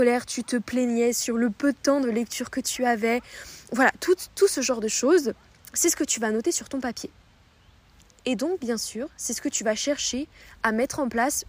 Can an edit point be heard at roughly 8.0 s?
no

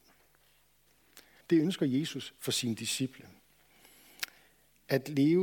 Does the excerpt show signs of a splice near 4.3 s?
no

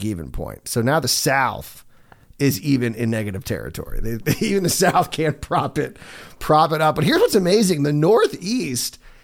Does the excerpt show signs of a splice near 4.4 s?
no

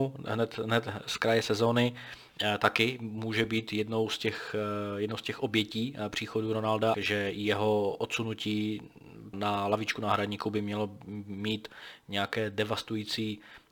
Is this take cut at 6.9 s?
yes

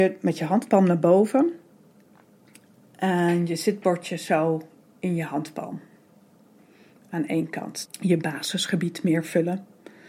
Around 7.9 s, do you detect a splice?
yes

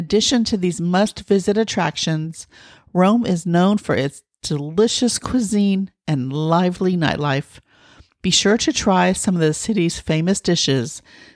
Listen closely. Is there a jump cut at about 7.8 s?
no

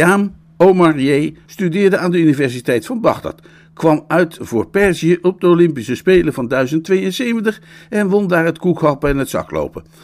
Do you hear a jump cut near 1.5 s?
yes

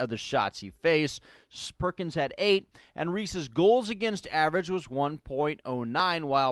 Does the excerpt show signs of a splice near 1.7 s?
yes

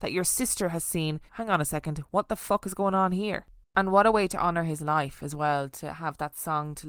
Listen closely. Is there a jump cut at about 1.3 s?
yes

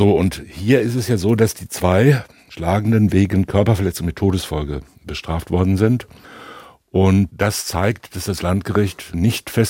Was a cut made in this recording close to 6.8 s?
no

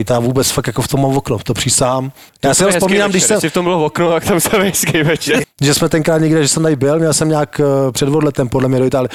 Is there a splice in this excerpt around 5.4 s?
yes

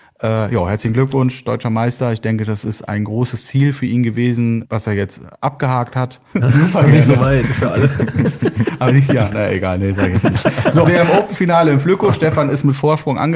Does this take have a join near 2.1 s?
no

